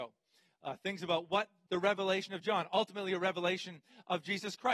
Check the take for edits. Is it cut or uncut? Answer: cut